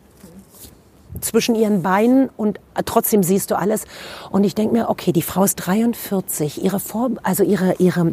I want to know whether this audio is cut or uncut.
uncut